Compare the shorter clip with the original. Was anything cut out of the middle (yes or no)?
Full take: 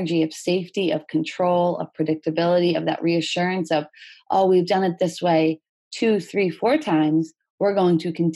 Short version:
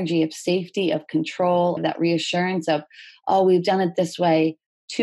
yes